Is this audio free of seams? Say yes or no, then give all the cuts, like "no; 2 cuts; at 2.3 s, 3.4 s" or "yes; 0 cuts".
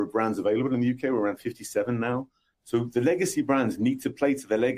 no; 1 cut; at 2.5 s